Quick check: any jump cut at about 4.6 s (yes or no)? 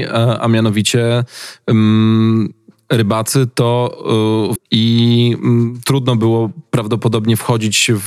yes